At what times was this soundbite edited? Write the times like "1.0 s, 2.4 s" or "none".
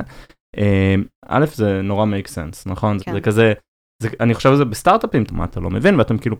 1.1 s, 3.0 s, 5.3 s